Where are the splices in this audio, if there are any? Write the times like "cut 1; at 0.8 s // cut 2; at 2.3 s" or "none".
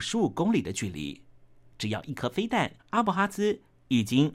cut 1; at 2.8 s